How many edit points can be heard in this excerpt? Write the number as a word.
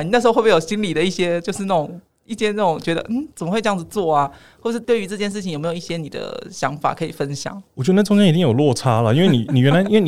zero